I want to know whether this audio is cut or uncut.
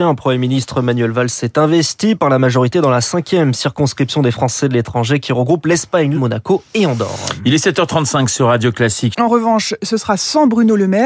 cut